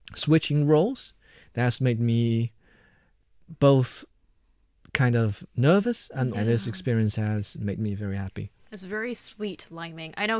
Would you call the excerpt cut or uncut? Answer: cut